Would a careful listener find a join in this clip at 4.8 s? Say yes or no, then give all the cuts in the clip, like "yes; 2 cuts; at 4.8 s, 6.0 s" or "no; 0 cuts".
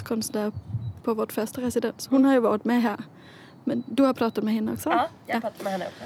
no; 1 cut; at 1.0 s